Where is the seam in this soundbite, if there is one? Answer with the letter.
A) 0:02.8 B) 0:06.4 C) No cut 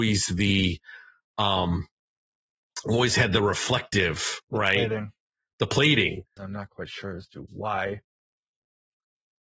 B